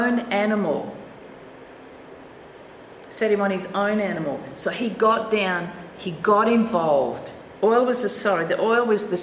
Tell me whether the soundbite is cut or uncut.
cut